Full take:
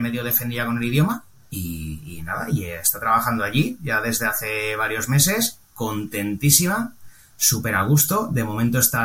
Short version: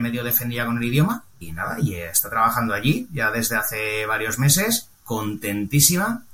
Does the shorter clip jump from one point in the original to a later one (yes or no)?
yes